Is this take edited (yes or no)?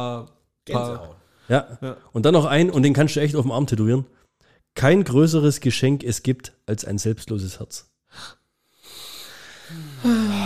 no